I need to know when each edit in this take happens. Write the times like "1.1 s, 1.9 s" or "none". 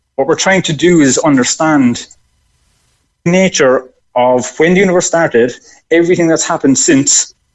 3.3 s